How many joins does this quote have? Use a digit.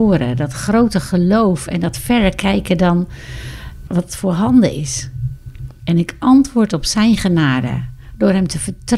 2